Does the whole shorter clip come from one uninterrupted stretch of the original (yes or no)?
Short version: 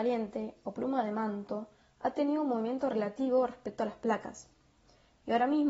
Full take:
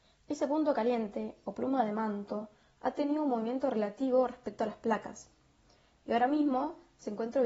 yes